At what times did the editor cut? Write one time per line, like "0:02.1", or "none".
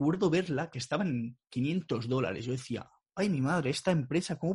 none